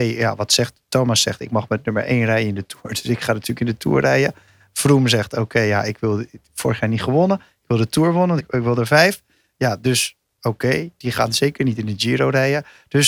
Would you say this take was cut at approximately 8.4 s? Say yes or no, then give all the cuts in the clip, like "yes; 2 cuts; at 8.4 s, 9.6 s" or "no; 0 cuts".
yes; 1 cut; at 8.4 s